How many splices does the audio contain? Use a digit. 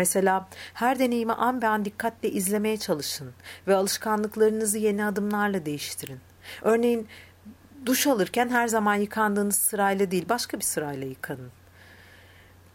0